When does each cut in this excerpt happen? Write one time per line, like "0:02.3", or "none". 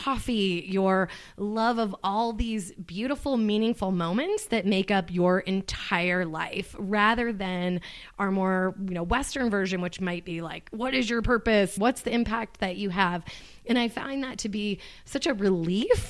0:11.8